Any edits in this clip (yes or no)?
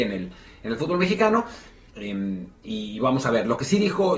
yes